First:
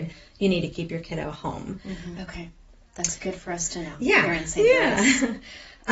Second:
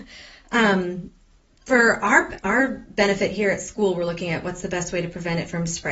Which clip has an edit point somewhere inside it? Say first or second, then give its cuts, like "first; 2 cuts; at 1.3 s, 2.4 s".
first; 1 cut; at 2.1 s